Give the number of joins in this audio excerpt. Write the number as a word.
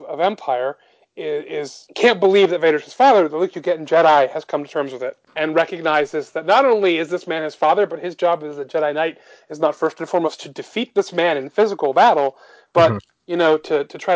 zero